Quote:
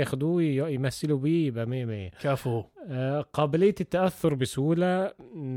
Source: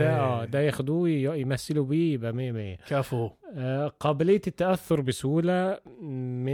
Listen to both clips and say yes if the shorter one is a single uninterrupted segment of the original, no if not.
yes